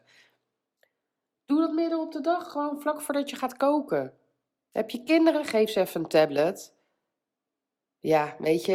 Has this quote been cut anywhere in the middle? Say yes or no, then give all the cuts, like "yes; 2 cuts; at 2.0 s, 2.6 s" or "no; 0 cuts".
no; 0 cuts